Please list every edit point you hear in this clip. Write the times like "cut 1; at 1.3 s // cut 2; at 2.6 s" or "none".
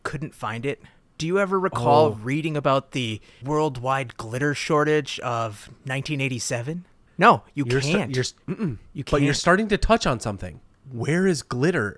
cut 1; at 8.4 s

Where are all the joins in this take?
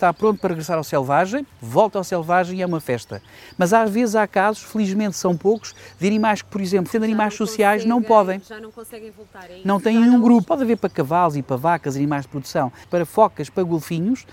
cut 1; at 6.9 s // cut 2; at 10.4 s // cut 3; at 12.8 s

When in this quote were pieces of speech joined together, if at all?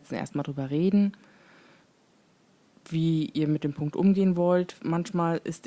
none

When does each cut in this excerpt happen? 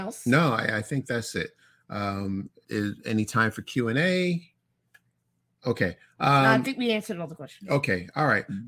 cut 1; at 2.6 s

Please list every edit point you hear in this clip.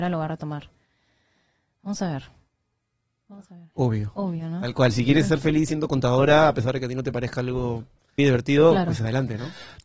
cut 1; at 3.7 s // cut 2; at 8.2 s

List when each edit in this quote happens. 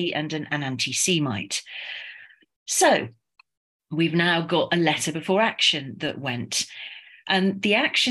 none

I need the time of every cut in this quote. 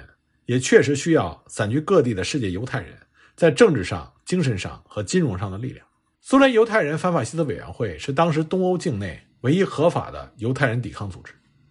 cut 1; at 6.1 s

